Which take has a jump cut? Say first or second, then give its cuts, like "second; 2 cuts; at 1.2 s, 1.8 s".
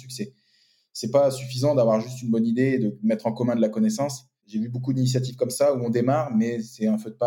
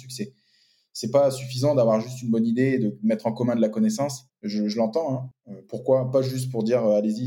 second; 2 cuts; at 4.3 s, 5.3 s